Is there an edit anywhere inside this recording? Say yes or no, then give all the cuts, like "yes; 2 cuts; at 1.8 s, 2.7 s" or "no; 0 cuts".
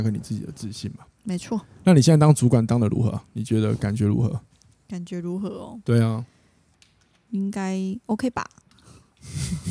yes; 1 cut; at 1.1 s